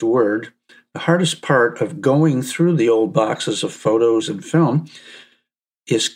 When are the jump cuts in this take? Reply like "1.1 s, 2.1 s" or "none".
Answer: 4.2 s